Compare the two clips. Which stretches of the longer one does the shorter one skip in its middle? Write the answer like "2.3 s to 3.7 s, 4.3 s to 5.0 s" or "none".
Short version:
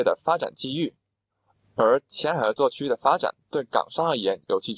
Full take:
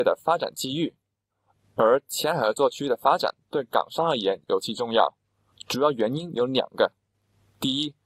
none